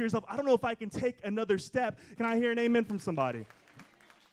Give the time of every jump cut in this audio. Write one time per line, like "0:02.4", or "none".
0:02.2